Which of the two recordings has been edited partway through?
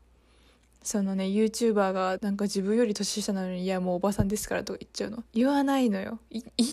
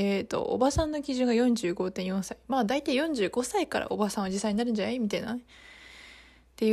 first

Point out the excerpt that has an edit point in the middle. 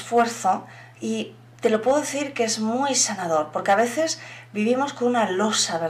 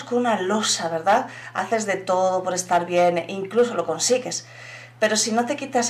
first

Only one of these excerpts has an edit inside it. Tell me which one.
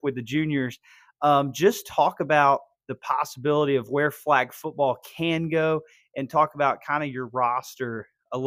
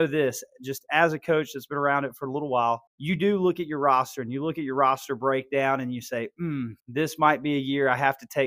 second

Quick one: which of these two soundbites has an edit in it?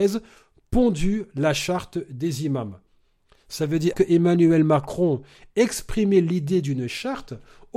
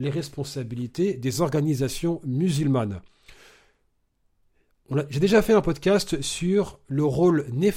first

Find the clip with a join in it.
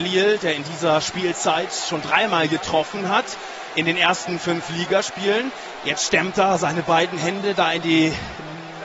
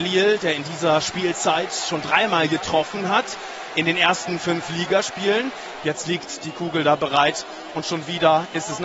second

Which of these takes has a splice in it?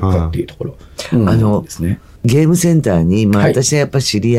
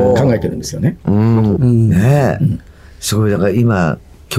second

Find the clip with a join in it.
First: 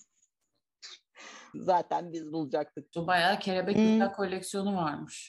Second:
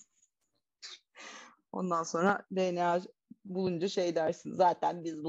first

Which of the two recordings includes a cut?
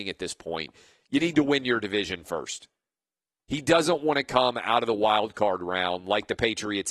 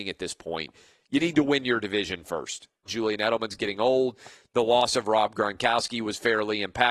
second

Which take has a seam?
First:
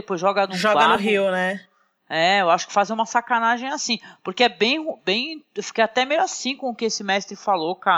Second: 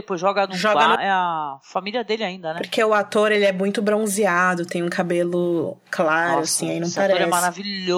second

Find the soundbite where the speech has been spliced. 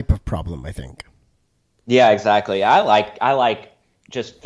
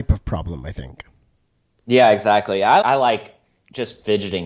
second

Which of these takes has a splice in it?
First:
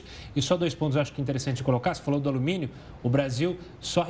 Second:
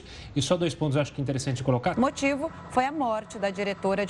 second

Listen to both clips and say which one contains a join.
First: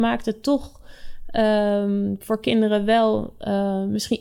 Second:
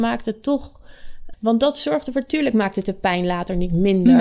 second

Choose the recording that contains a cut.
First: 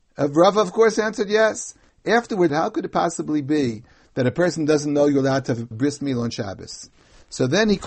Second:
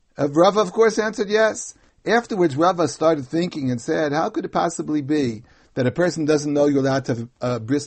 first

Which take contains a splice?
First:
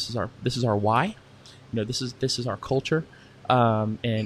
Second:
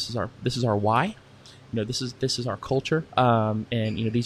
second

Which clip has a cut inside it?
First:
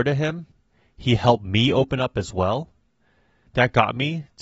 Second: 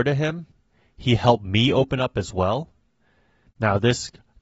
second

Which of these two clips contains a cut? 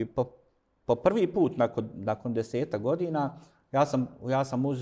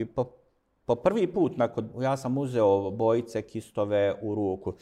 second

